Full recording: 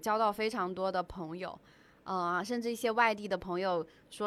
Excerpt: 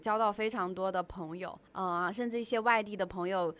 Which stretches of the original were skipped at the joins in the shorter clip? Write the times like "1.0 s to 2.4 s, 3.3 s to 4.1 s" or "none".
1.7 s to 2.0 s